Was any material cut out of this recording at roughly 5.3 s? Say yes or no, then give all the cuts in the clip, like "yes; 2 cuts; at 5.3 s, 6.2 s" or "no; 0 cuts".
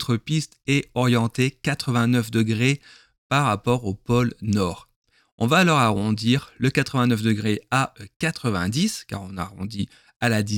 no; 0 cuts